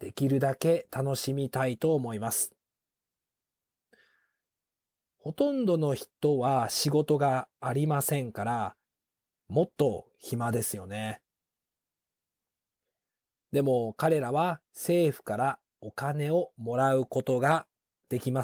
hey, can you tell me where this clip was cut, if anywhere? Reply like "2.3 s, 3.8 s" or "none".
14.7 s